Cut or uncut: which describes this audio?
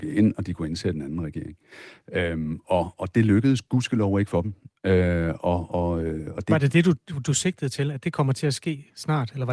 uncut